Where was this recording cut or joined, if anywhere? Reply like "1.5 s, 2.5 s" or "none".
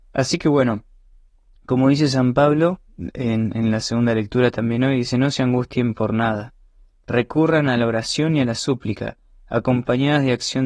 none